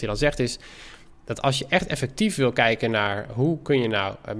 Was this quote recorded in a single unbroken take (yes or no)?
yes